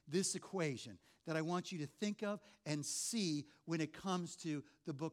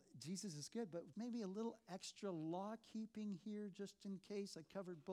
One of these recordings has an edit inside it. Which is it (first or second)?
second